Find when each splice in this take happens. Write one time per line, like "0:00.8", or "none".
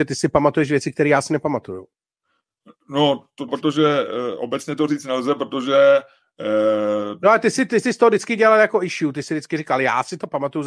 0:03.5